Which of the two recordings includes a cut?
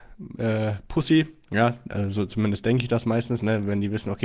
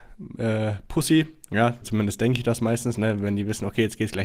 second; 1 cut; at 1.8 s

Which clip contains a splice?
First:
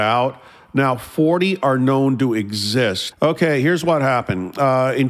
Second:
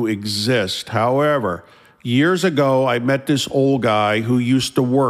first; 1 cut; at 3.1 s

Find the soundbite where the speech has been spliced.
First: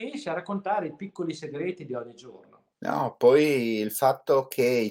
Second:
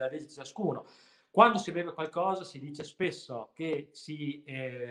first; 1 cut; at 2.7 s

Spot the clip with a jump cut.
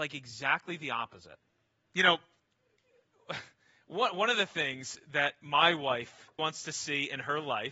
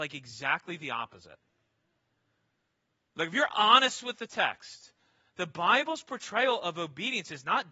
first; 2 cuts; at 1.9 s, 6.4 s

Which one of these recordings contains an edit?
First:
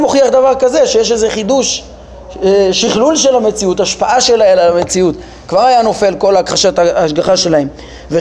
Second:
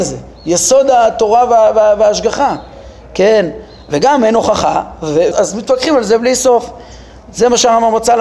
second; 1 cut; at 5.3 s

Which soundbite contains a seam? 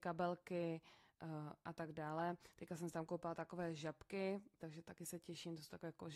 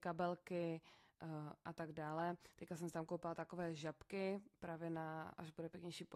first; 1 cut; at 4.6 s

